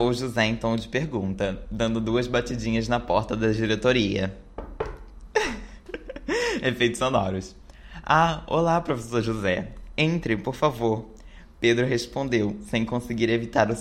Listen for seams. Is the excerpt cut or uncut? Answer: uncut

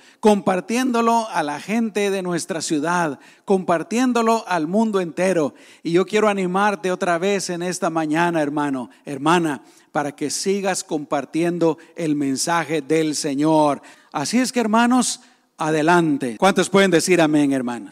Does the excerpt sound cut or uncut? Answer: cut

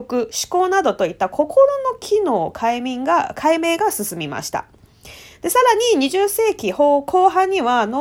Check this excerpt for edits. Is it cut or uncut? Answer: uncut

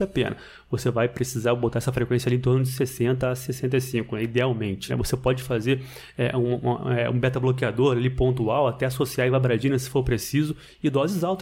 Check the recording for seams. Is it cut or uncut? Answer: cut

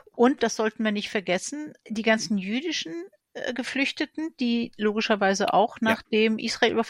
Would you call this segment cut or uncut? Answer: cut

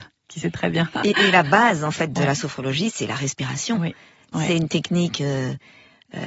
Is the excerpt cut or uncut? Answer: uncut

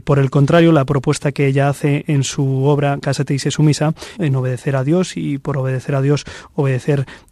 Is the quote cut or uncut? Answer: cut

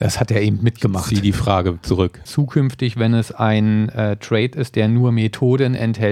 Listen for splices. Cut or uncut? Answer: cut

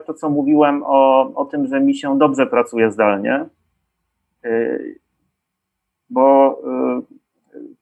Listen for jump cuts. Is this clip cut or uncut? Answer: uncut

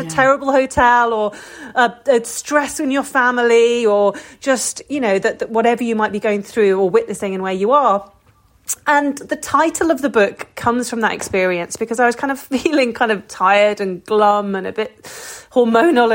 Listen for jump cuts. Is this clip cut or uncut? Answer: uncut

